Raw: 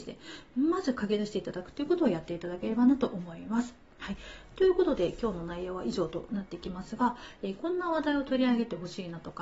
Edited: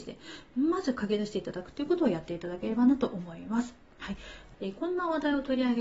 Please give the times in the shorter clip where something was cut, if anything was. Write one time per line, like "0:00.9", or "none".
0:04.5